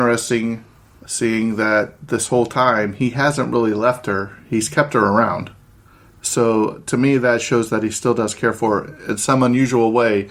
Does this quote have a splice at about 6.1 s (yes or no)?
no